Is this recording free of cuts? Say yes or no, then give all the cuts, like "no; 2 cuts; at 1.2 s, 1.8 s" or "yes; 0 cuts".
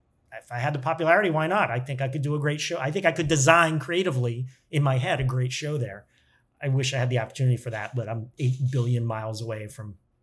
yes; 0 cuts